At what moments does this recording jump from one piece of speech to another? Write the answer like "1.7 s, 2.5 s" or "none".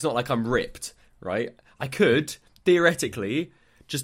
none